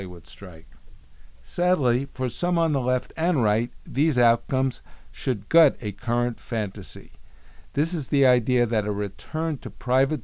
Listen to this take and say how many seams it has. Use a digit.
0